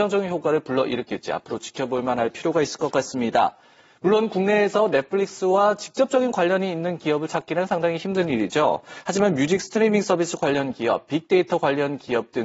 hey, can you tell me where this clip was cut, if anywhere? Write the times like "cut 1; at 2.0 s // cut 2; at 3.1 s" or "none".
none